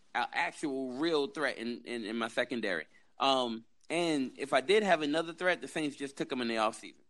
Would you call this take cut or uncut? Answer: uncut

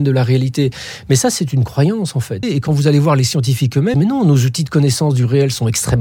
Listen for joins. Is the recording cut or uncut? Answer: cut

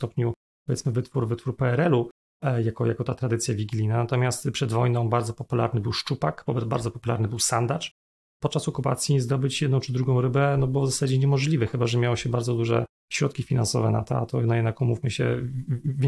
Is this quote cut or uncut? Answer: uncut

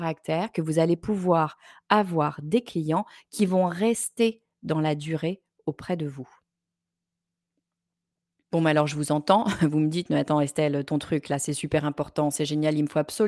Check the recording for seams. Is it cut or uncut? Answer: uncut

